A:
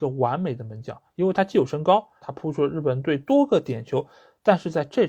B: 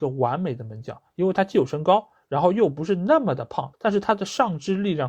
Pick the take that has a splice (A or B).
A